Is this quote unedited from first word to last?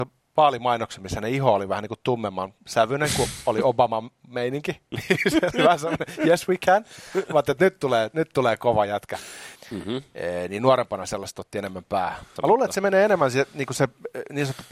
no; 2 cuts; at 9.6 s, 12.4 s

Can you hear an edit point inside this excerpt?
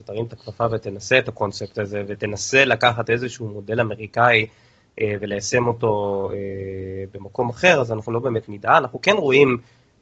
no; 0 cuts

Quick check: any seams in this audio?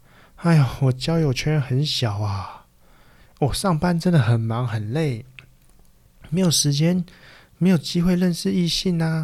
no; 0 cuts

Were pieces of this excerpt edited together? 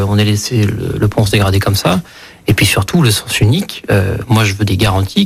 no; 0 cuts

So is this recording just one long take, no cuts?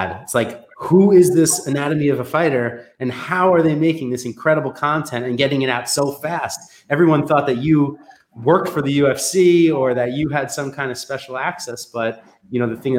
yes; 0 cuts

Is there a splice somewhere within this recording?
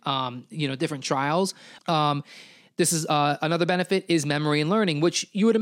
yes; 1 cut; at 1.8 s

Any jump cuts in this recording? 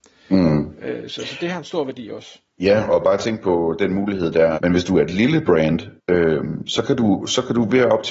yes; 3 cuts; at 2.5 s, 4.5 s, 6.0 s

